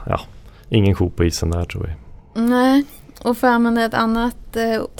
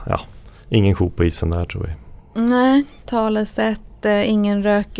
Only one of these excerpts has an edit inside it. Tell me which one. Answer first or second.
second